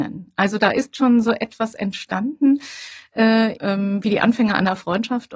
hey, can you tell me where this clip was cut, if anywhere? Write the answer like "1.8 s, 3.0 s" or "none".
3.6 s